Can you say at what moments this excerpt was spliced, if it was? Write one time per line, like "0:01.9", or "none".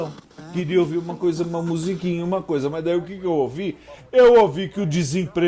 none